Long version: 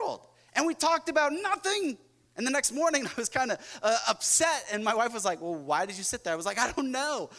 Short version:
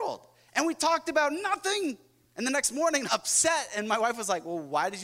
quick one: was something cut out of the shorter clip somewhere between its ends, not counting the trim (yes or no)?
yes